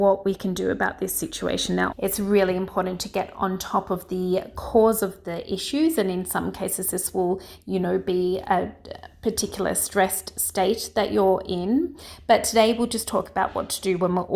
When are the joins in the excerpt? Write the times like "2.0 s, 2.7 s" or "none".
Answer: 1.9 s